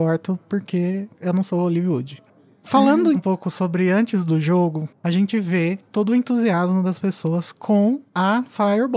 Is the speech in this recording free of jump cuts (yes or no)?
no